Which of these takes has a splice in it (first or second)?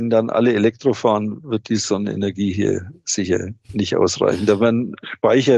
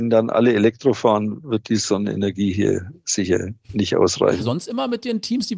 second